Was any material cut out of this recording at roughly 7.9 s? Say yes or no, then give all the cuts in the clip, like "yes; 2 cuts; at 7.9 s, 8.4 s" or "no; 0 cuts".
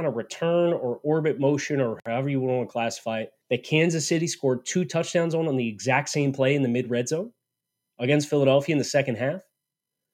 no; 1 cut; at 3.4 s